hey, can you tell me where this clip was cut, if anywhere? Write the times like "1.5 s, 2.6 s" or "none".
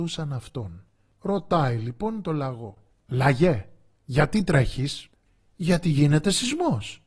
none